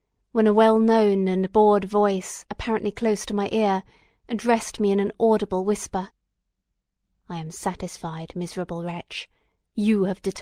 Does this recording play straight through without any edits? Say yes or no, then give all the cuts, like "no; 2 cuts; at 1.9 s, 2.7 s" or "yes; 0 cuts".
yes; 0 cuts